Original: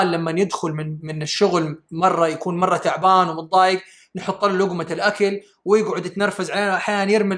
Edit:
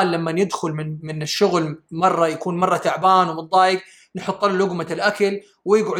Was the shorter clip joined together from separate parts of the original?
no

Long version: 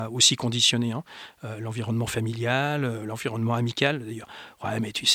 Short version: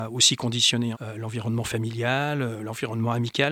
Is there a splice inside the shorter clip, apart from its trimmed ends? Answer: yes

